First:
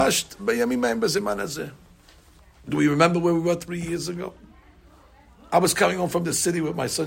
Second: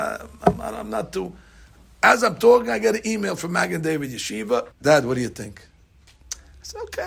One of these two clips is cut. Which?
second; 1 cut; at 4.7 s

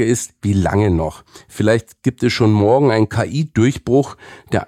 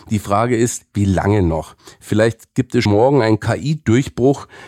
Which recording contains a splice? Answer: second; 1 cut; at 2.9 s

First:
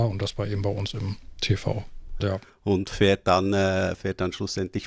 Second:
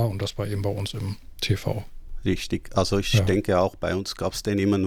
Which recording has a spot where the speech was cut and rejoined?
first; 1 cut; at 2.2 s

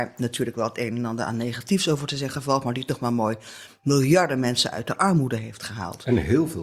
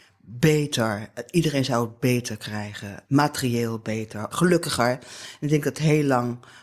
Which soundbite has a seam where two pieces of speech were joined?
second; 2 cuts; at 3.0 s, 4.3 s

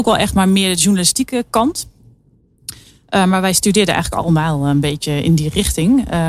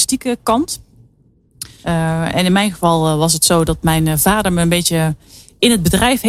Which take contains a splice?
second; 1 cut; at 1.8 s

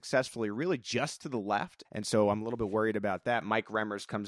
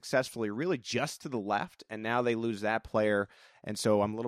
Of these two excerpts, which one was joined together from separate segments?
first; 1 cut; at 1.8 s

